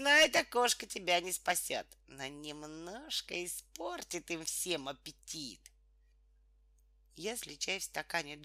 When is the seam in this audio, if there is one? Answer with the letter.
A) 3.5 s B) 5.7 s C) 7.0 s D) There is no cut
D